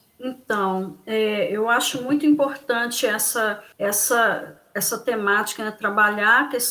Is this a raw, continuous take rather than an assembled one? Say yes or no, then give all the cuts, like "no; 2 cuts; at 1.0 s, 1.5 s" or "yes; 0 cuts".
no; 1 cut; at 3.7 s